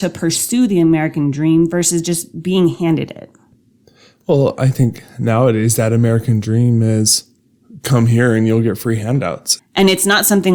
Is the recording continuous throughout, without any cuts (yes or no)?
no